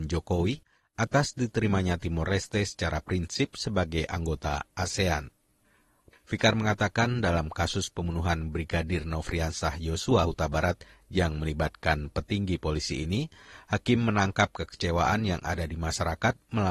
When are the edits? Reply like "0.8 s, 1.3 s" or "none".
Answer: 6.1 s

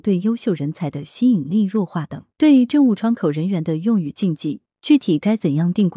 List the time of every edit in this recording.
2.3 s

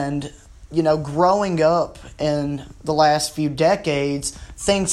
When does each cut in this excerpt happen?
2.8 s

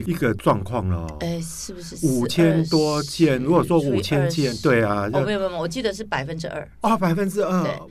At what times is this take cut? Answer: none

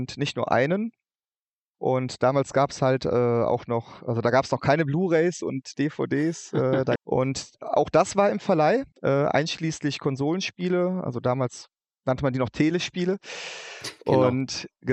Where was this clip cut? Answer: 1.7 s, 7.0 s, 8.9 s

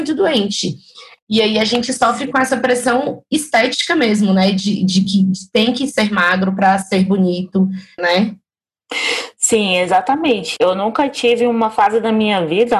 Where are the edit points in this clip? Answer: 8.0 s, 10.6 s

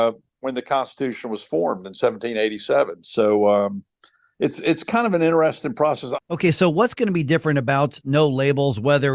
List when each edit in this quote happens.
6.2 s

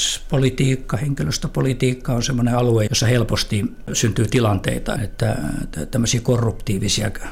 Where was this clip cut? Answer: 2.9 s, 5.0 s

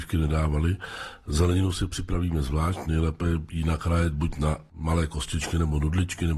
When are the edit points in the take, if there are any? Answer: none

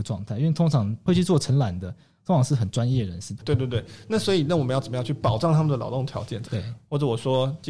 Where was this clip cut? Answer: 3.4 s, 6.4 s

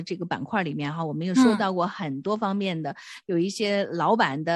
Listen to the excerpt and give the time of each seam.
3.2 s

